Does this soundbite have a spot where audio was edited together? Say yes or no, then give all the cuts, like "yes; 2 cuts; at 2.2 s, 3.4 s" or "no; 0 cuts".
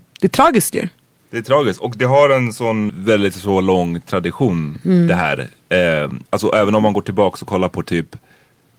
yes; 2 cuts; at 2.9 s, 6.2 s